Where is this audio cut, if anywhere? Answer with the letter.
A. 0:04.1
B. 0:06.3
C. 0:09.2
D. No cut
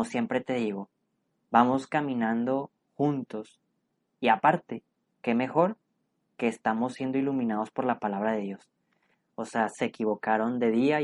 C